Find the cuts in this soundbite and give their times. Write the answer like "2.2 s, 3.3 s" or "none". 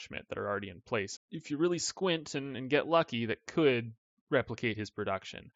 1.2 s